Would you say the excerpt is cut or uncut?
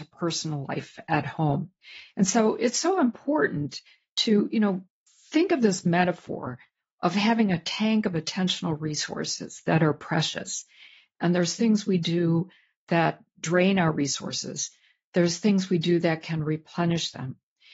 uncut